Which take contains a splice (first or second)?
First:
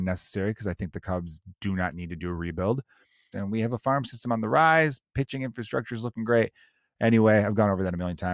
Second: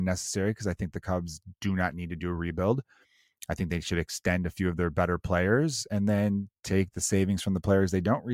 first